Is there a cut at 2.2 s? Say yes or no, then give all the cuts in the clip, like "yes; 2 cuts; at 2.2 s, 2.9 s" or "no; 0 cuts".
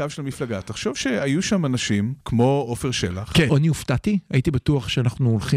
yes; 2 cuts; at 2.2 s, 3.5 s